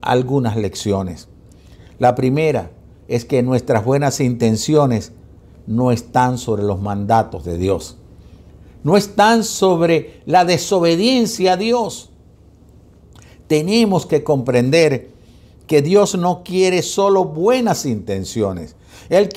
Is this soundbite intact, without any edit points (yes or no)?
yes